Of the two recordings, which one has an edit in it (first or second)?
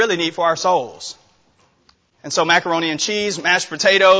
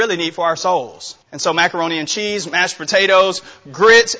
second